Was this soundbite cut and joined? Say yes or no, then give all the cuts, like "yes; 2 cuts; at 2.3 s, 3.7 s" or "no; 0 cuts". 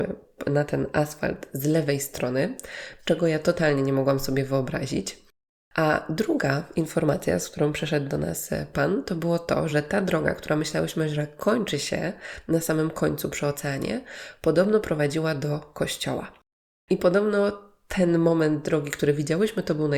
no; 0 cuts